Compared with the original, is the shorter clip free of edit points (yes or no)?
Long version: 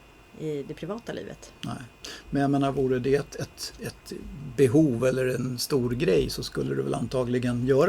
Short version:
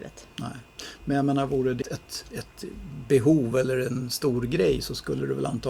no